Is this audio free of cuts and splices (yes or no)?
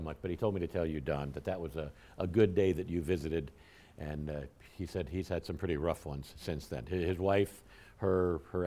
yes